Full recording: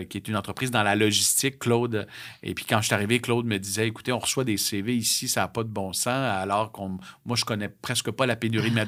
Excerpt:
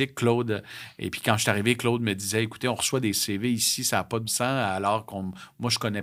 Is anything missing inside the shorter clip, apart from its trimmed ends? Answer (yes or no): yes